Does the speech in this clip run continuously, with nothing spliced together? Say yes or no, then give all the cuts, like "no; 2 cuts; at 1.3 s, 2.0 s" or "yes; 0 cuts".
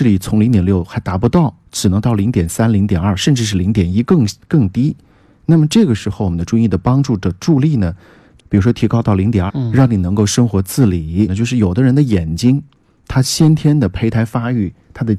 no; 3 cuts; at 8.4 s, 9.5 s, 11.3 s